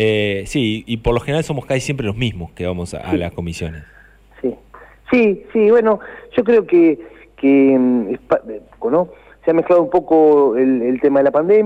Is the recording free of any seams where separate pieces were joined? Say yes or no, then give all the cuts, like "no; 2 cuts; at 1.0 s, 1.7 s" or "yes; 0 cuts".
no; 1 cut; at 8.8 s